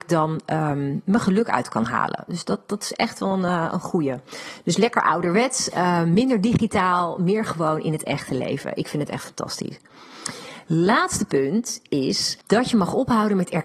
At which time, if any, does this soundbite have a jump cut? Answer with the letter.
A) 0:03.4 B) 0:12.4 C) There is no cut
B